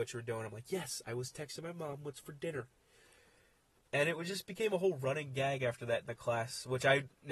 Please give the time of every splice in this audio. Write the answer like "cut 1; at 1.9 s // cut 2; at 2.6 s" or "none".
none

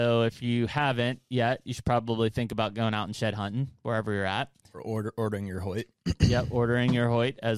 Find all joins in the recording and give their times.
none

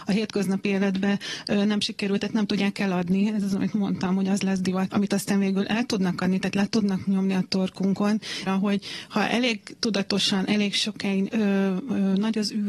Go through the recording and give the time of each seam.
cut 1; at 4.9 s // cut 2; at 8.5 s // cut 3; at 11.3 s

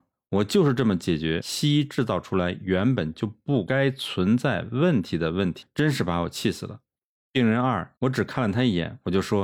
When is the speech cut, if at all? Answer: cut 1; at 8.0 s

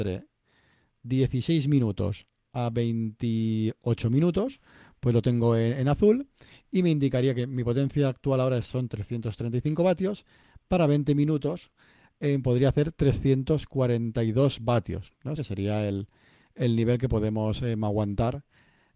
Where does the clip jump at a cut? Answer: cut 1; at 15.4 s

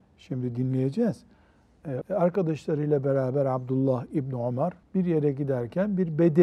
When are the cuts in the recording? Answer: cut 1; at 2.0 s // cut 2; at 4.8 s

